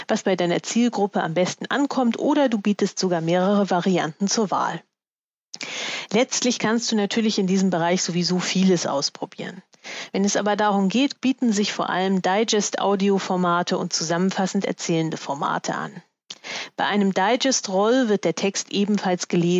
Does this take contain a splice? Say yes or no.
yes